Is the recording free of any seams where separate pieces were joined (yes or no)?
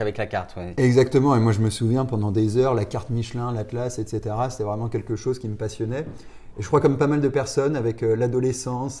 yes